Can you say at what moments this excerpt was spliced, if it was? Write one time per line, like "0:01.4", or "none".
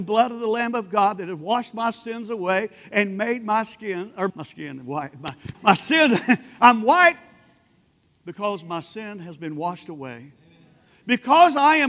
0:04.3
0:05.5